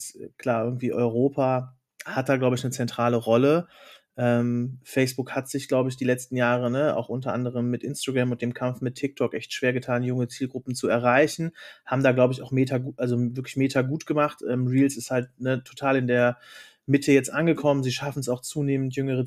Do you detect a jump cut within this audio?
no; 0 cuts

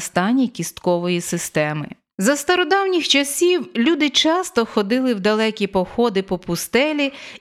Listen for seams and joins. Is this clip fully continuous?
no; 1 cut; at 2.1 s

